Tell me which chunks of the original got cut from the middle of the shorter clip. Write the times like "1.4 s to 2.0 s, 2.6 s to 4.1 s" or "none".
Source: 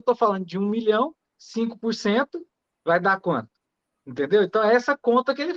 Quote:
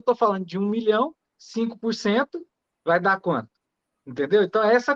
none